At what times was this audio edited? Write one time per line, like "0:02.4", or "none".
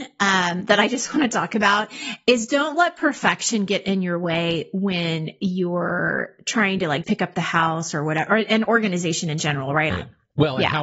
0:07.0
0:08.6
0:09.9